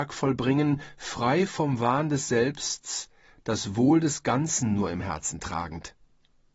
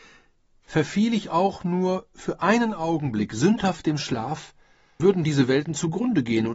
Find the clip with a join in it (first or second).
second